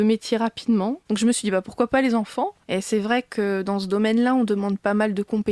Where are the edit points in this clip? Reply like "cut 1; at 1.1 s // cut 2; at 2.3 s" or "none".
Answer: cut 1; at 1.0 s // cut 2; at 2.6 s